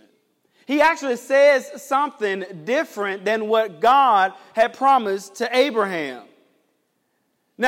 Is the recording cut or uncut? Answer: uncut